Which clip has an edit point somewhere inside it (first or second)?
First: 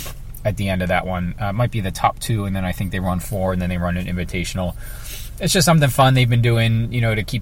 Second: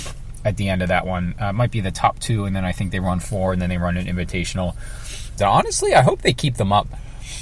second